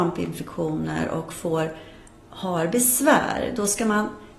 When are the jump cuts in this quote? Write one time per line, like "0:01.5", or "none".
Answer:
none

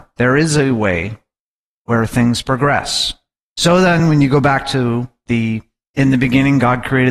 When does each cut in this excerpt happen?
none

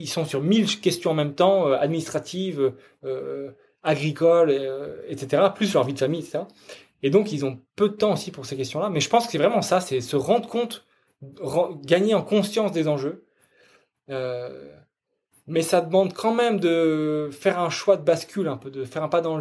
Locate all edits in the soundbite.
none

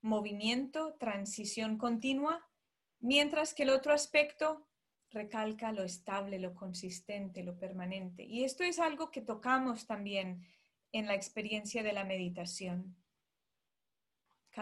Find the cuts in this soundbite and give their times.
0:05.0

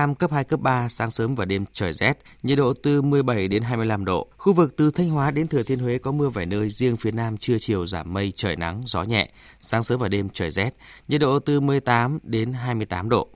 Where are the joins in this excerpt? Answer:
0:04.3

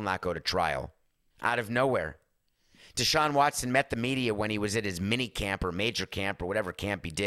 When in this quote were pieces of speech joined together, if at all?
0:01.3

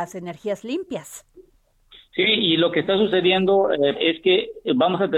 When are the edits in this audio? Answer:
0:03.9

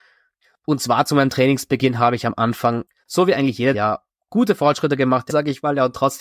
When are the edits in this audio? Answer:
0:03.7
0:05.3

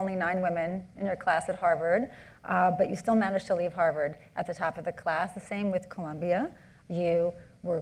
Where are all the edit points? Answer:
0:06.8

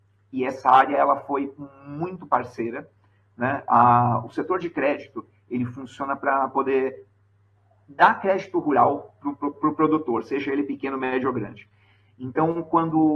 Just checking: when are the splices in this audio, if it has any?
none

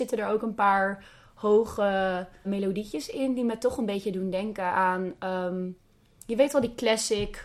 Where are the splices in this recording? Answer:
0:02.4

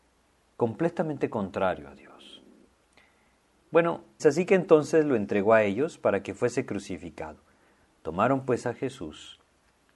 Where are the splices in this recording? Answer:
0:04.2

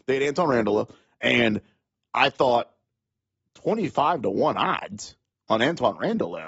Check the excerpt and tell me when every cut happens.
none

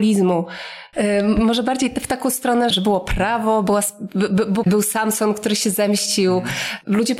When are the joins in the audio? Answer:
0:00.9
0:02.7
0:04.6

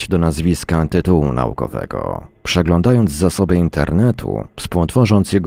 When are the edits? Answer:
none

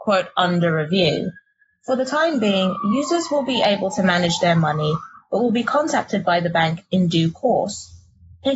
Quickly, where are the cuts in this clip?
none

